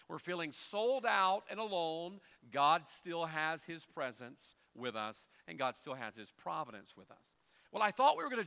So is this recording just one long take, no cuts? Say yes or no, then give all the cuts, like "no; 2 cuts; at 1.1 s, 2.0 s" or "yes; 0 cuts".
yes; 0 cuts